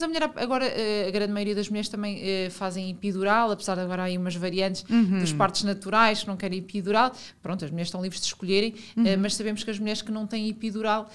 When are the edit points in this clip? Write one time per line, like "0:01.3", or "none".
none